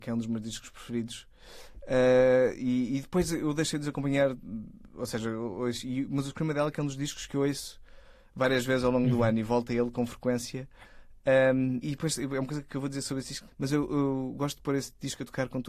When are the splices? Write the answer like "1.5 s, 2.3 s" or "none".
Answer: 11.8 s, 13.5 s